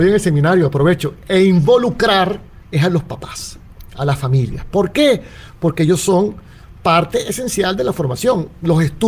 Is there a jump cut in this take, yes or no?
no